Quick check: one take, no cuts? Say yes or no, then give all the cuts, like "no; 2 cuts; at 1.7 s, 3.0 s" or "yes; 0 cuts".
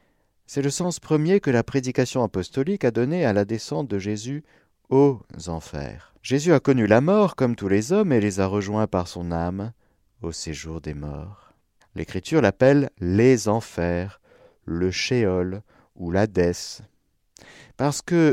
no; 2 cuts; at 6.2 s, 11.8 s